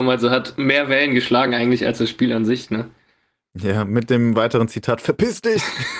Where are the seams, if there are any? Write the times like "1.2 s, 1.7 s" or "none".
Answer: none